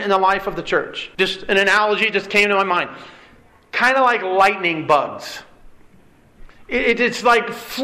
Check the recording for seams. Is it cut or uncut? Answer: cut